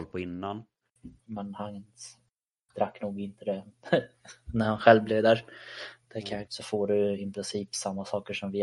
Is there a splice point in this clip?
yes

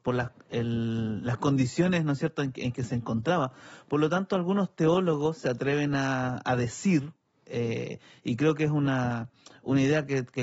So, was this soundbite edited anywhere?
no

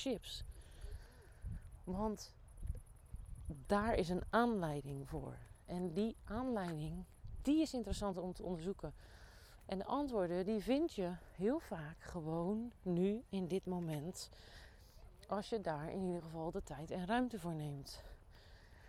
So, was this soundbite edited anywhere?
no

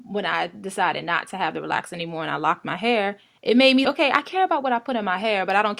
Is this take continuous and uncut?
no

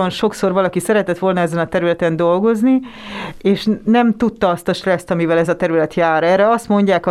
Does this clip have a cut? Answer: no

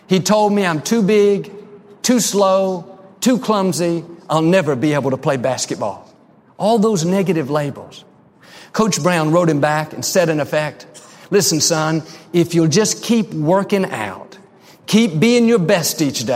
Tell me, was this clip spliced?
no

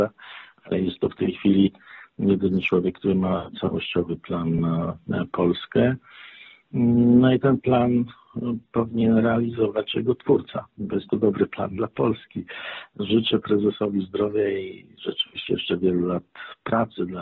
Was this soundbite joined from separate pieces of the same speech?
no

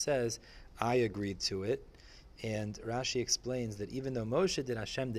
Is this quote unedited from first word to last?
yes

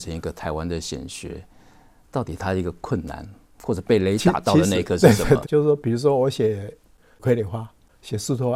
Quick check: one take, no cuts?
no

